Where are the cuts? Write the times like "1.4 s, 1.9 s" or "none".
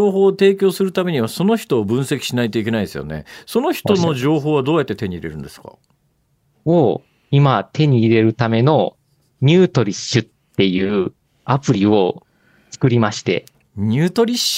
none